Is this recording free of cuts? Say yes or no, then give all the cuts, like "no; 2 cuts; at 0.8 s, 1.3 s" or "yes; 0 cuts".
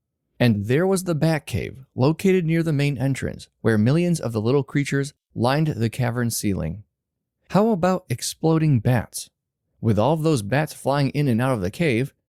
no; 1 cut; at 7.4 s